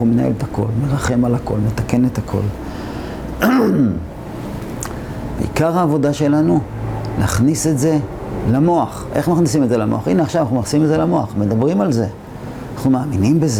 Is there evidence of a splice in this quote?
no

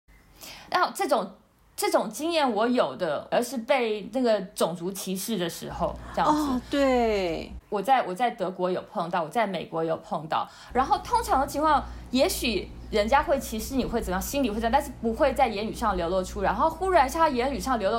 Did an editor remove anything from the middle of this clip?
yes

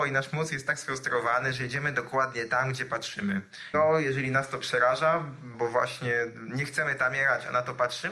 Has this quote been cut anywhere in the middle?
yes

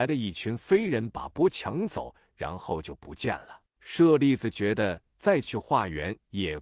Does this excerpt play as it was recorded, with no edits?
no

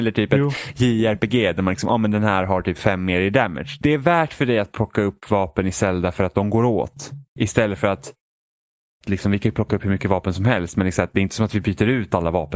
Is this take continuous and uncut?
no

